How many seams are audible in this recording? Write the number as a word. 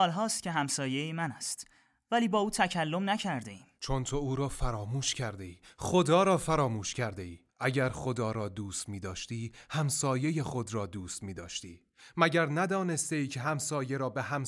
two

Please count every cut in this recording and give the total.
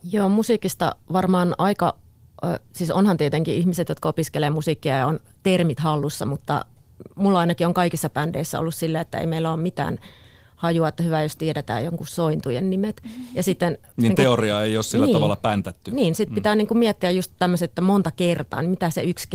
zero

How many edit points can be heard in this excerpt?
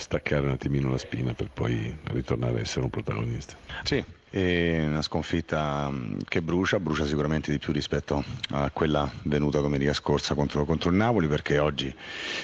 one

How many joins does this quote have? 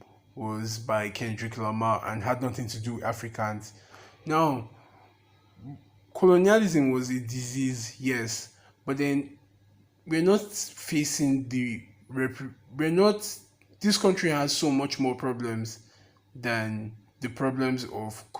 zero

